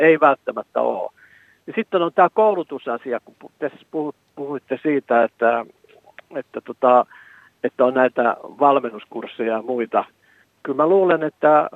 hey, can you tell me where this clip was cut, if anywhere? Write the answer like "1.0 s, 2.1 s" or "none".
10.5 s